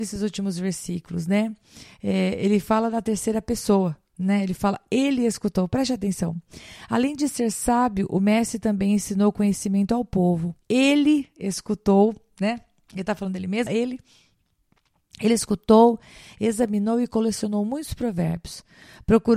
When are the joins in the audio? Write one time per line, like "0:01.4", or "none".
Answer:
0:10.6
0:13.7